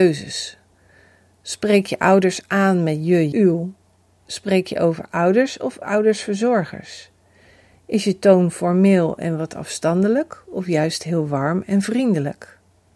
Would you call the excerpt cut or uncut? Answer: cut